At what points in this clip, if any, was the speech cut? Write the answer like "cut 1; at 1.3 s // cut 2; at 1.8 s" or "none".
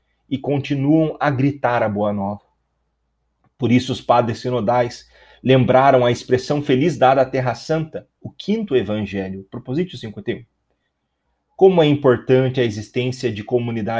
none